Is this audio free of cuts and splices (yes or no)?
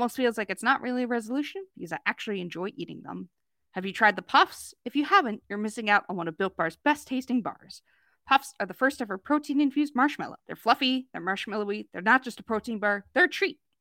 no